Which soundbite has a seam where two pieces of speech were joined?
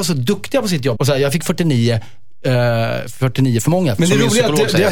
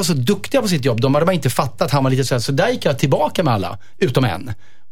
first; 2 cuts; at 1.0 s, 4.0 s

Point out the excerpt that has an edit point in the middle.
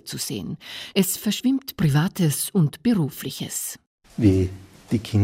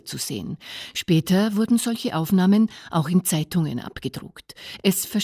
first; 1 cut; at 0.9 s

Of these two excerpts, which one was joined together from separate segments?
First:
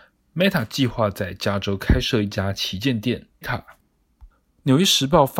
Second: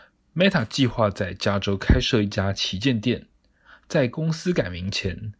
first; 1 cut; at 3.4 s

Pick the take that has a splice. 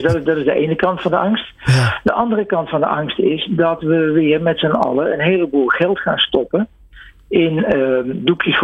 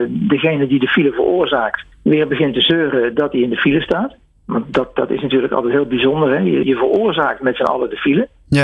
second; 2 cuts; at 1.9 s, 6.6 s

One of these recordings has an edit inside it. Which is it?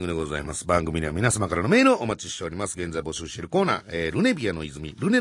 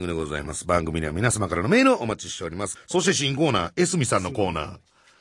second; 1 cut; at 2.8 s

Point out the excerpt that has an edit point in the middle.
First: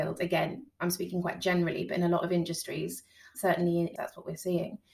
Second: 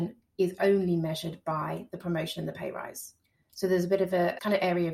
first; 1 cut; at 4.0 s

